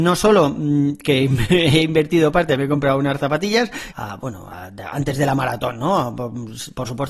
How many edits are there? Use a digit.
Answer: 1